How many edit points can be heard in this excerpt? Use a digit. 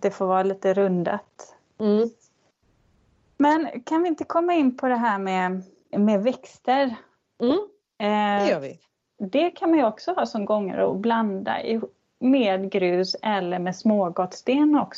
2